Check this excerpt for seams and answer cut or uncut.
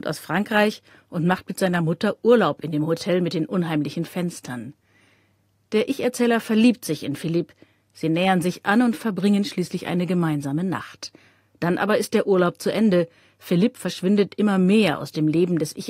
uncut